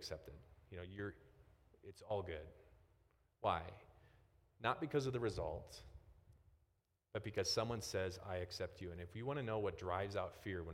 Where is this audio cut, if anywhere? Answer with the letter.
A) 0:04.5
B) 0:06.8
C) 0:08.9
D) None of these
D